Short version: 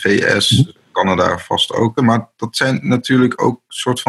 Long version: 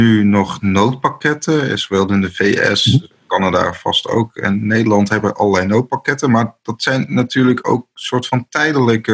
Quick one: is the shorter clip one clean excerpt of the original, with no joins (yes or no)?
no